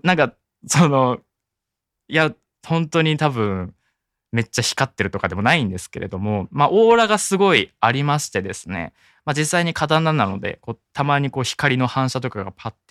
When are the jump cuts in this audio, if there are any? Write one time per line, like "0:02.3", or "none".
none